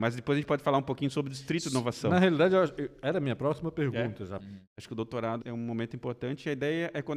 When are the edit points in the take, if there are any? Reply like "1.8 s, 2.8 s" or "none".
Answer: 4.4 s, 5.4 s